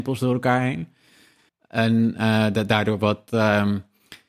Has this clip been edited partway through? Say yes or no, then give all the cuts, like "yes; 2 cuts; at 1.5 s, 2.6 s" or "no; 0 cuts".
yes; 1 cut; at 1.5 s